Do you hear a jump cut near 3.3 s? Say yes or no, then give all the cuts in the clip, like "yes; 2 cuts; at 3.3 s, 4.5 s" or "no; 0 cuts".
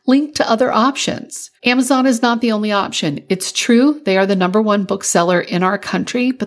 no; 1 cut; at 1.6 s